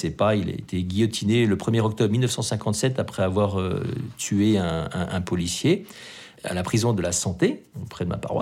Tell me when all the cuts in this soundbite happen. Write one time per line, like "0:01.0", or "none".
none